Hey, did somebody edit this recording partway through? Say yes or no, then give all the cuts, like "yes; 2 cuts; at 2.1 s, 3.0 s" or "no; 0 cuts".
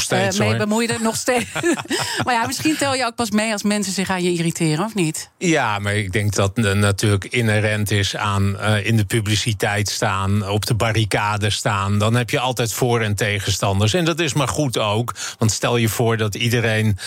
yes; 1 cut; at 6.3 s